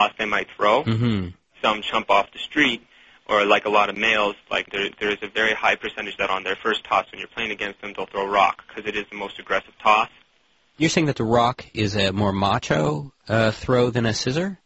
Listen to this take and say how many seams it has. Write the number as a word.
zero